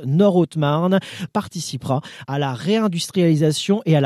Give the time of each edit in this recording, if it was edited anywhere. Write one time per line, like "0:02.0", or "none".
0:01.3